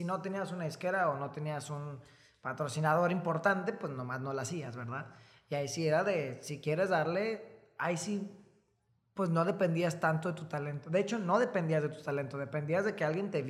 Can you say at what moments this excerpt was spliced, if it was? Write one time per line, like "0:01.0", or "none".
none